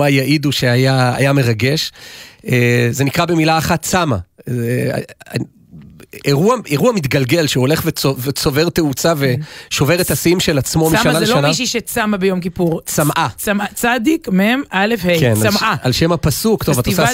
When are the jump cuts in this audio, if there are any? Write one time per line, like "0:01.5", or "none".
none